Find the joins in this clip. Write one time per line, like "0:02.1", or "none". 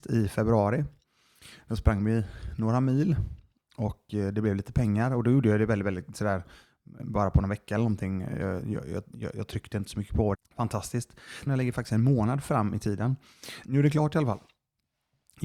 0:10.3
0:11.5
0:13.6